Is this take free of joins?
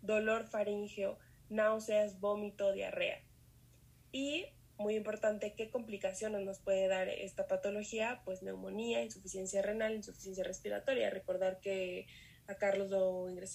yes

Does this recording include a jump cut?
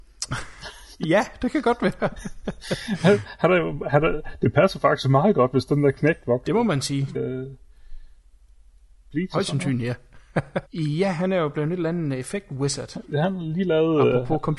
yes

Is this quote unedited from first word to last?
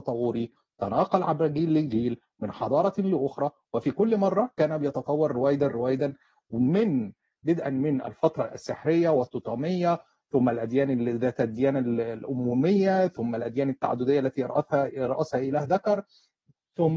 yes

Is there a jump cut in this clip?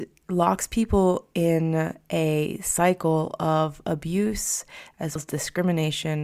yes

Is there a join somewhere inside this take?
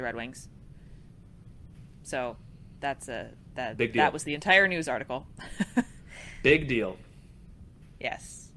no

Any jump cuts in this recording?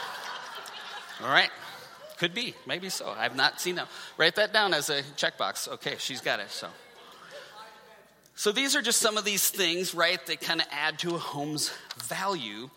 no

